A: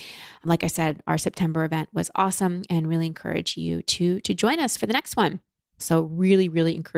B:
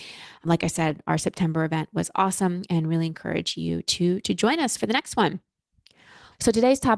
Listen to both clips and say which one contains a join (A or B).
A